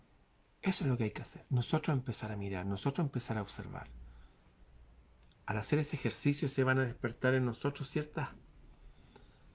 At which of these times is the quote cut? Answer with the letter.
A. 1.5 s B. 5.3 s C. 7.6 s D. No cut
A